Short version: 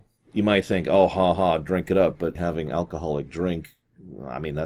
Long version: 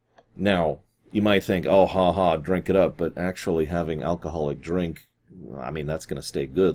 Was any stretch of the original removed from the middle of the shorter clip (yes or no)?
yes